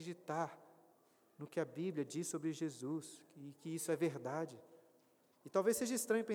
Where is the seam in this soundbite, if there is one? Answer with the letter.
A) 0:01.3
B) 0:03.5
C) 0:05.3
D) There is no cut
C